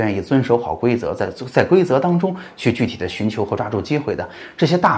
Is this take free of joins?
yes; 0 cuts

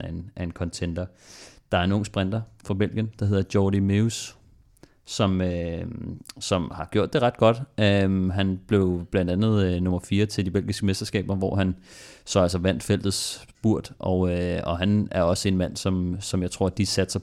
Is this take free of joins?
yes; 0 cuts

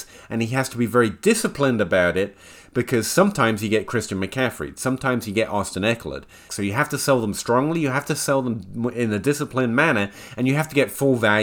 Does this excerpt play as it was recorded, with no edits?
no; 1 cut; at 6.5 s

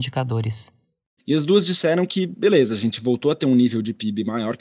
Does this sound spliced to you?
yes; 1 cut; at 1.2 s

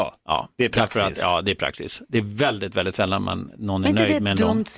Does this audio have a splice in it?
no; 0 cuts

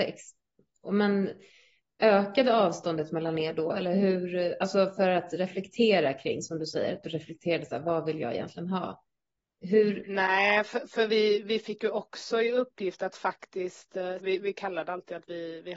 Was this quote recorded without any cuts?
no; 1 cut; at 14.2 s

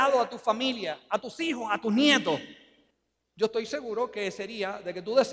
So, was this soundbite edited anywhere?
no; 0 cuts

